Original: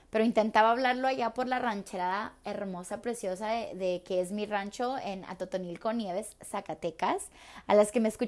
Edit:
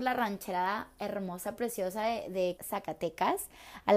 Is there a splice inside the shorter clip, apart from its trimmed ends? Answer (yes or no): yes